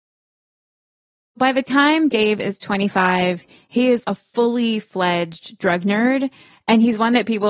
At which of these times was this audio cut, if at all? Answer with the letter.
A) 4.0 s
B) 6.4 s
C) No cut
A